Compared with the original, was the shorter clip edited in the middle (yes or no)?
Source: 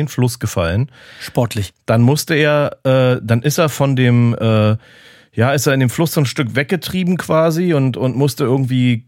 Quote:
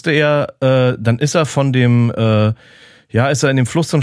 no